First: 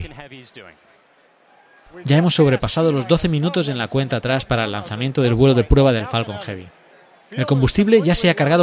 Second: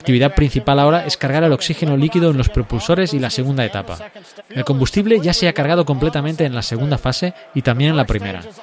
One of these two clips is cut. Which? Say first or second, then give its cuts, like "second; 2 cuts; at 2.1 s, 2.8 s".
second; 1 cut; at 4.4 s